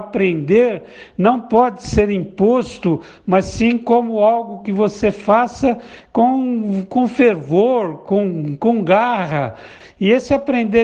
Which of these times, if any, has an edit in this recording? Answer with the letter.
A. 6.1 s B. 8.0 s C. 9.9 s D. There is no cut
D